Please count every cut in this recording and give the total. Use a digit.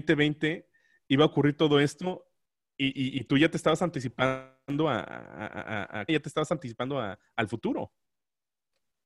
1